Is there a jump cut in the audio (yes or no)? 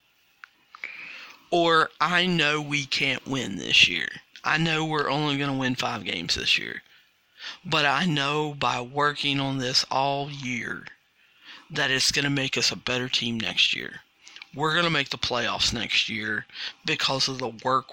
no